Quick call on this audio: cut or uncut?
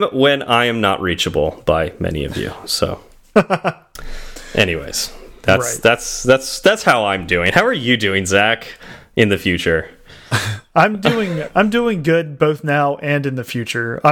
uncut